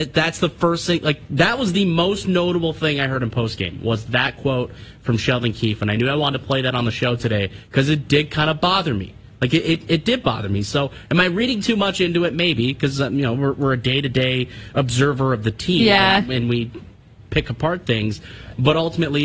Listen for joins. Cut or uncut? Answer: uncut